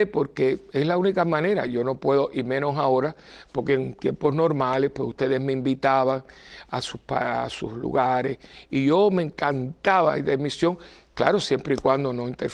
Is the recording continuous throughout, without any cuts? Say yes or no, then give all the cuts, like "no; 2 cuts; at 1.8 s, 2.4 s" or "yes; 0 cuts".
yes; 0 cuts